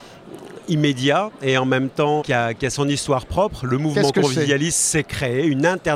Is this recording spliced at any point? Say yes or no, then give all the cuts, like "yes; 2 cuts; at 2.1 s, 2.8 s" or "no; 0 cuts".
yes; 1 cut; at 2.2 s